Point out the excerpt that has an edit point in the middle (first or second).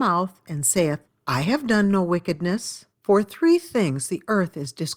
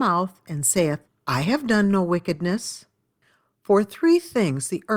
first